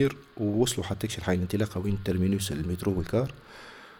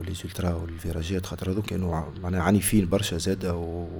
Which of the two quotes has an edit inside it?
second; 1 cut; at 1.6 s

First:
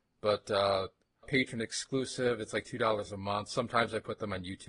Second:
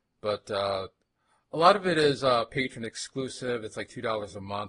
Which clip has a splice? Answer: first; 1 cut; at 1.2 s

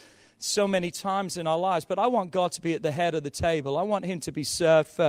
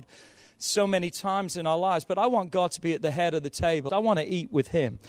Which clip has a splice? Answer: second; 1 cut; at 3.9 s

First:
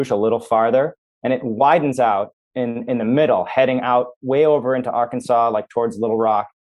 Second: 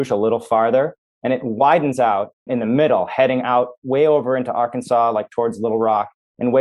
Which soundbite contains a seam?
second; 1 cut; at 2.5 s

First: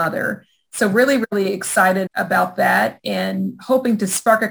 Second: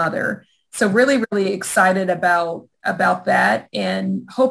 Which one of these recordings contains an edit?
first; 1 cut; at 2.1 s

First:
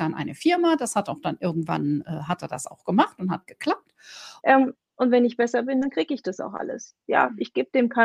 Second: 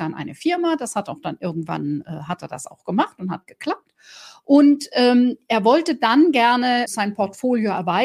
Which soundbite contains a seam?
first; 1 cut; at 4.4 s

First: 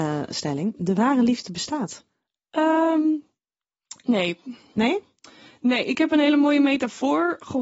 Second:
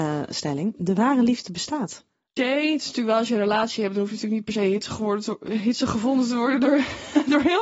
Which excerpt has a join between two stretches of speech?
second; 1 cut; at 2.4 s

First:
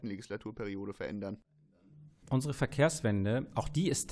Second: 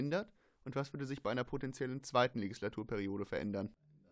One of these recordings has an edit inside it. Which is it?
first; 1 cut; at 2.2 s

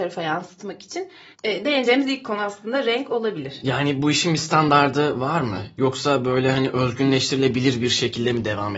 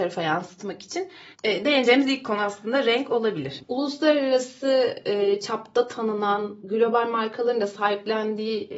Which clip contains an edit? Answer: second; 2 cuts; at 3.6 s, 6.6 s

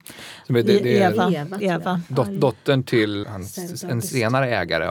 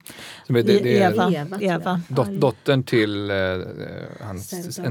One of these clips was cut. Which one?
first; 1 cut; at 3.2 s

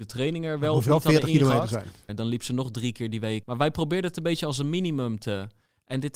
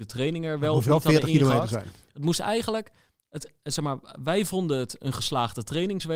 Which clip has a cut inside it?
first; 2 cuts; at 2.1 s, 3.4 s

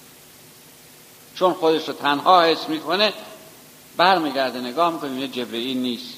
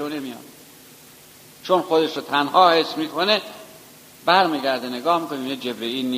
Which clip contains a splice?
second; 1 cut; at 1.5 s

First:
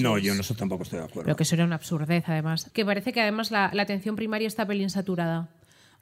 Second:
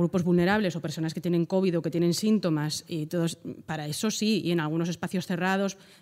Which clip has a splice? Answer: first; 1 cut; at 2.7 s

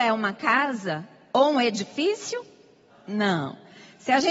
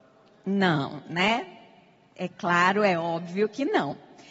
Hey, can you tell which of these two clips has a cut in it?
first; 1 cut; at 2.9 s

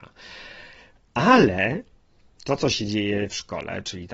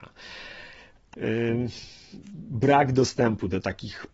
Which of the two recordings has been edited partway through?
second; 1 cut; at 1.1 s

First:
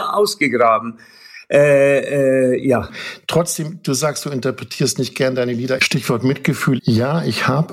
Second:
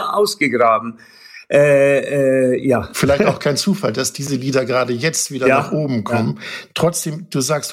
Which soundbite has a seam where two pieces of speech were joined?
first; 3 cuts; at 2.9 s, 5.8 s, 6.8 s

